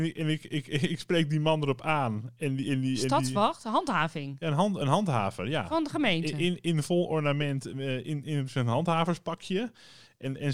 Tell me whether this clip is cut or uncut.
uncut